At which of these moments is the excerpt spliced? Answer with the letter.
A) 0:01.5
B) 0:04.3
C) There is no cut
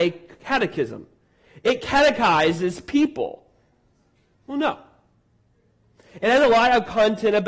B